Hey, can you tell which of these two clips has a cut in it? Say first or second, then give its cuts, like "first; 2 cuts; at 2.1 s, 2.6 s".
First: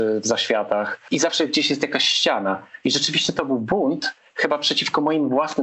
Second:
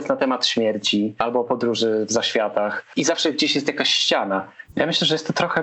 second; 1 cut; at 4.6 s